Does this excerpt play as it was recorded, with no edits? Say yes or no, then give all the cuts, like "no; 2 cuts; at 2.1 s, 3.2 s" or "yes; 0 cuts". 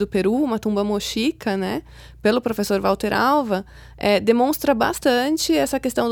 yes; 0 cuts